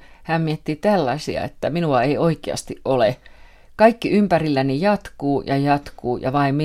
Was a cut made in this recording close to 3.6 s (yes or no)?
no